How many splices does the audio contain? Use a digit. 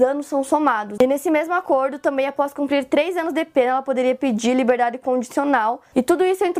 1